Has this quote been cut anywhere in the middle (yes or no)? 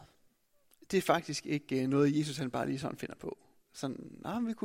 no